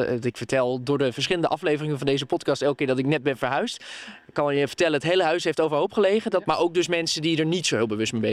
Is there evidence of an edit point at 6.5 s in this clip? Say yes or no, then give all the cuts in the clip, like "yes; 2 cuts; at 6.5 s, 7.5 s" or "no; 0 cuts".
yes; 1 cut; at 6.5 s